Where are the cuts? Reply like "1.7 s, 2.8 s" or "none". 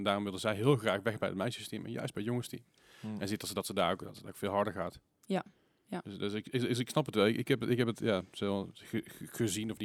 none

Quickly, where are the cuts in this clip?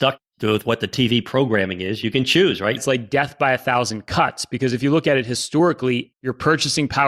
2.8 s, 6.1 s

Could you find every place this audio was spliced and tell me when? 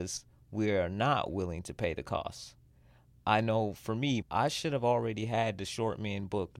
4.2 s

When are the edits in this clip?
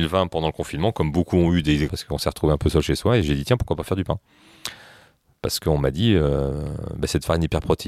1.9 s

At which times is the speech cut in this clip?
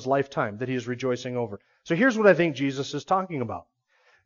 none

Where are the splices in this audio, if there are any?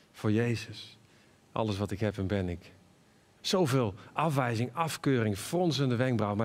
1.4 s, 3.4 s

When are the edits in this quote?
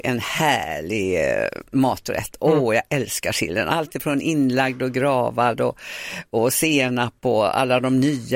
none

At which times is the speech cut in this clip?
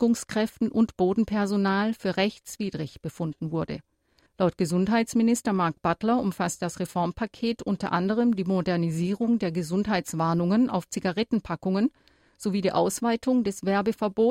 4.3 s

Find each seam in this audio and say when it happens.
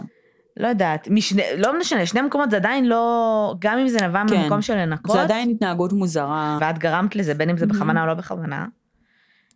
6.6 s

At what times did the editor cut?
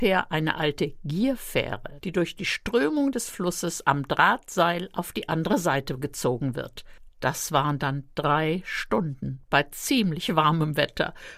2.0 s, 7.1 s

